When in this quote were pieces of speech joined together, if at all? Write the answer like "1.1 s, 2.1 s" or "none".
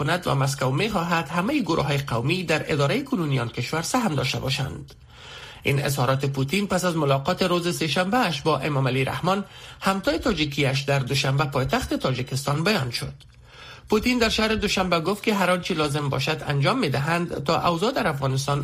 none